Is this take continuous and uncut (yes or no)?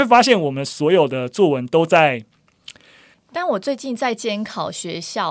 no